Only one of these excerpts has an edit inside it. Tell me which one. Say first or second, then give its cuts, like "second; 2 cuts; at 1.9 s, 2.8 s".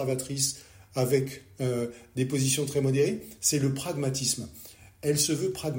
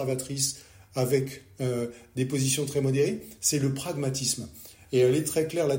second; 1 cut; at 4.8 s